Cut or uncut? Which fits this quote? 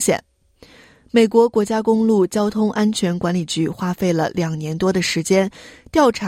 uncut